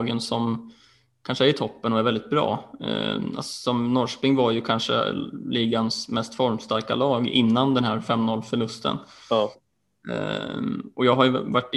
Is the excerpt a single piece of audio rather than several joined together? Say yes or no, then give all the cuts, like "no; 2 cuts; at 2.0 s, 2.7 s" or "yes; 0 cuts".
yes; 0 cuts